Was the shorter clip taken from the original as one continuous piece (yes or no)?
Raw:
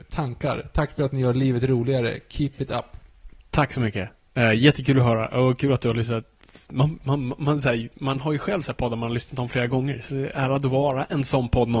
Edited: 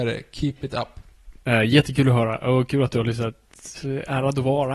no